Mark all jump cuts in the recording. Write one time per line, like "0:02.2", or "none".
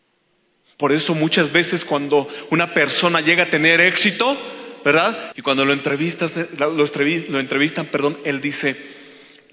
0:05.3